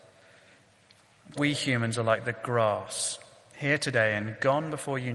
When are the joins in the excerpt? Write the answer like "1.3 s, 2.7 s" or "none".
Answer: 1.3 s